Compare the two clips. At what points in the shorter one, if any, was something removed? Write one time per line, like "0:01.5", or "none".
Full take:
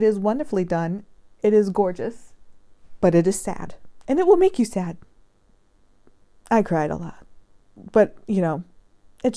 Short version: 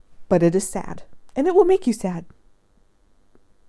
none